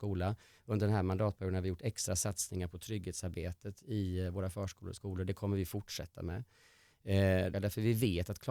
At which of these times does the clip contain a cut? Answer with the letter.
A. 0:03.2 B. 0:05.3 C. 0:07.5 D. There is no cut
C